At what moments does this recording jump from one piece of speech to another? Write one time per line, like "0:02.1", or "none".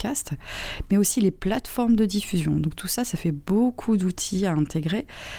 none